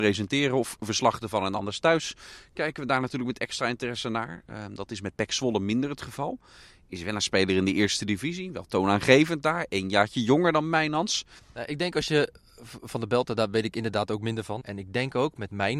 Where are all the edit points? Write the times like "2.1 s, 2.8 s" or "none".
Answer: 11.4 s, 14.6 s